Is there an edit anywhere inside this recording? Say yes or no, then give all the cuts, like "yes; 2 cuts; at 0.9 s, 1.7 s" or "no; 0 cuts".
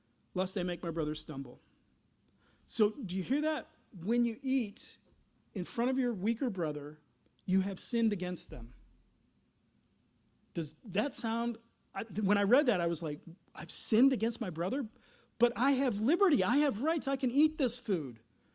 no; 0 cuts